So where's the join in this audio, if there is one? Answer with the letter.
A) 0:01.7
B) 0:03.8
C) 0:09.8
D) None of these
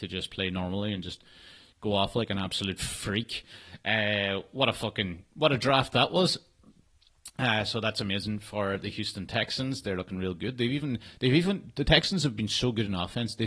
D